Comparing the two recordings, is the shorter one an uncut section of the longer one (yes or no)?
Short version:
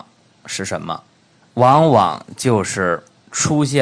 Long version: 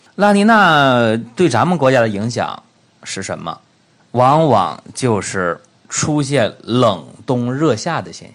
yes